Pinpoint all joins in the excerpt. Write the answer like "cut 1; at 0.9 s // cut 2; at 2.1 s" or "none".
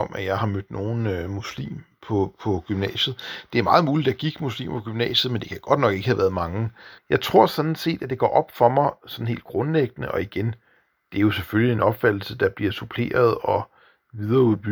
cut 1; at 7.0 s